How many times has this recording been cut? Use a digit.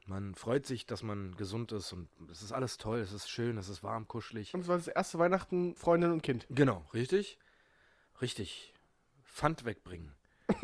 2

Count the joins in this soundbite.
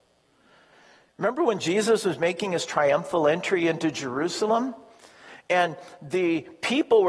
0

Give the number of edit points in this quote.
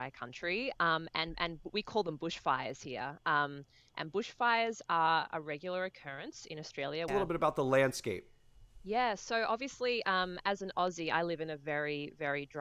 1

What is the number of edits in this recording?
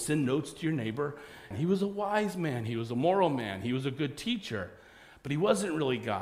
1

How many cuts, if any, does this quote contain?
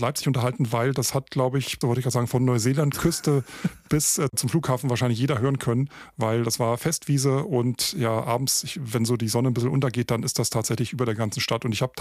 2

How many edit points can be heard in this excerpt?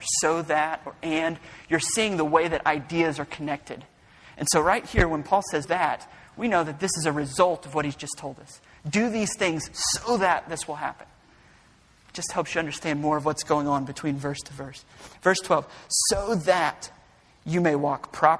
1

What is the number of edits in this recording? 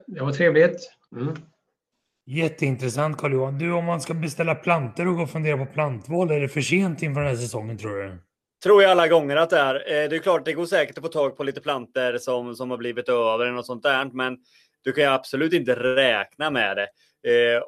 0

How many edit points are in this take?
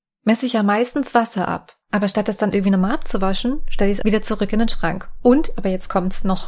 2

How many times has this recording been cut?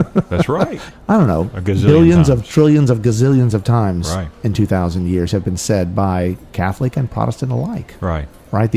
1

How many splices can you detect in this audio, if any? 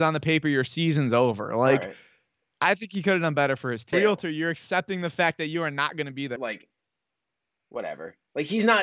2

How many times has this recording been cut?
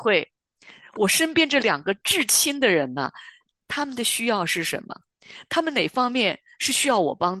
0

